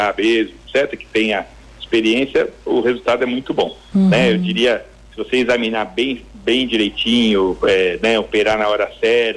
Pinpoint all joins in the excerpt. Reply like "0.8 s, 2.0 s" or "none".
3.9 s